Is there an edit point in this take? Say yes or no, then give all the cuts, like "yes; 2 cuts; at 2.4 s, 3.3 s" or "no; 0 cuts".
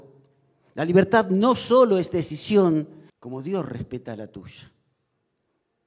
yes; 1 cut; at 3.1 s